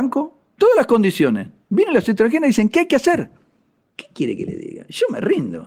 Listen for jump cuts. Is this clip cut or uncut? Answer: uncut